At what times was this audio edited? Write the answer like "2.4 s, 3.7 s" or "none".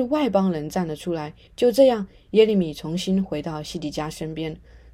1.5 s

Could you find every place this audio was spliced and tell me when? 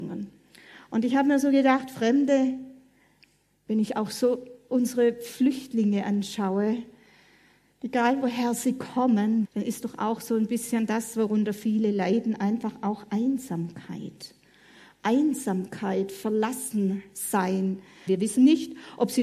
9.4 s, 18.1 s

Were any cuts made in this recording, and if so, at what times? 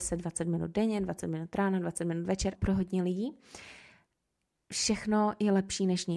2.6 s

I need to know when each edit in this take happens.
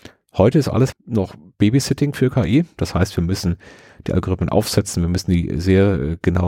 0.9 s

